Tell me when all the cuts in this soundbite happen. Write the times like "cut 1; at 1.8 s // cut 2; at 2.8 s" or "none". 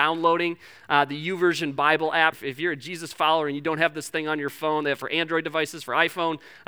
cut 1; at 2.3 s

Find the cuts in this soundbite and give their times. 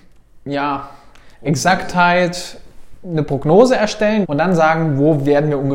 cut 1; at 1.3 s // cut 2; at 4.2 s

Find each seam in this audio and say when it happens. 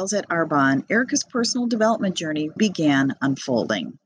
cut 1; at 2.6 s

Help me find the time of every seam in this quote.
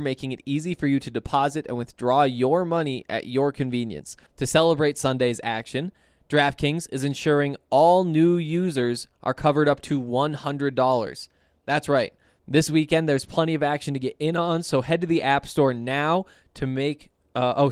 cut 1; at 4.3 s // cut 2; at 12.3 s

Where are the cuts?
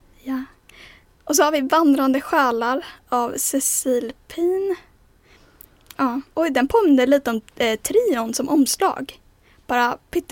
cut 1; at 6.3 s

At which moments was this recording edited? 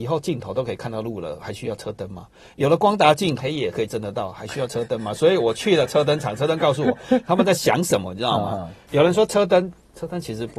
cut 1; at 3.4 s // cut 2; at 8.9 s

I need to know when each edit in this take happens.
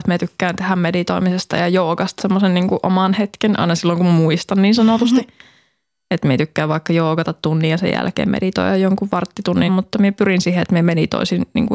cut 1; at 2.2 s // cut 2; at 9.7 s

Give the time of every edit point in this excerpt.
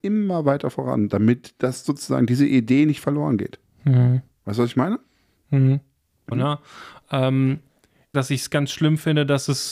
cut 1; at 6.3 s // cut 2; at 8.1 s

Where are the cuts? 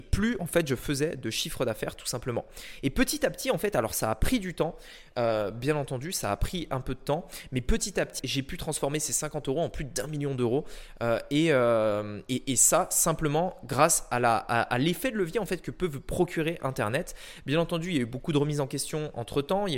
cut 1; at 8.2 s

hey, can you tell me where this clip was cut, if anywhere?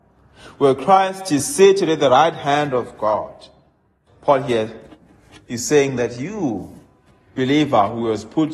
cut 1; at 4.1 s

